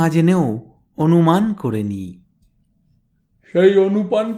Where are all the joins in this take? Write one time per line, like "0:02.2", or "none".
none

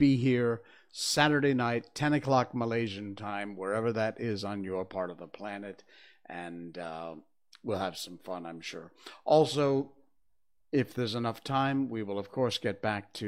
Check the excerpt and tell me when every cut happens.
none

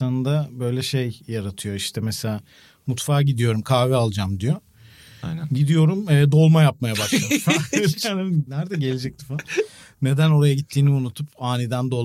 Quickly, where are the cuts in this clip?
0:08.5

